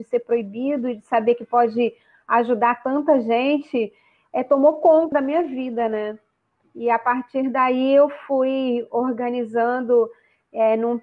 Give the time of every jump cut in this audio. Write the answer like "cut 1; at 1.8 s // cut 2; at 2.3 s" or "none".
cut 1; at 5.1 s

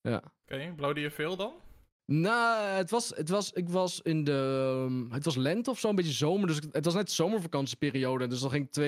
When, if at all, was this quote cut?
none

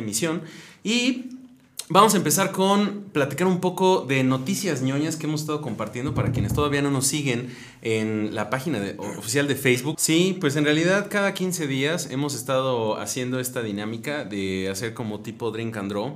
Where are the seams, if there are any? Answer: cut 1; at 9.9 s

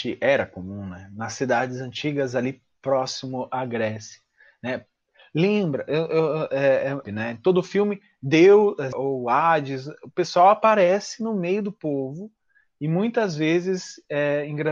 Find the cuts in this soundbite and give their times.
cut 1; at 7.0 s // cut 2; at 8.9 s

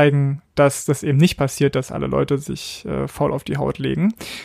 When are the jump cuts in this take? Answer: none

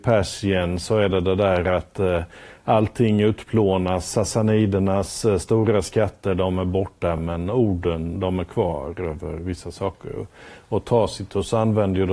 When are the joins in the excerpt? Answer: none

